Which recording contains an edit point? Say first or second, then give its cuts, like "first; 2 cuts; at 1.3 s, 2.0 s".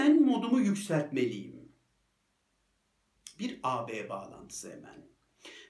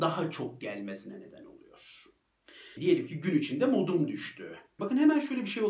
second; 2 cuts; at 2.8 s, 4.8 s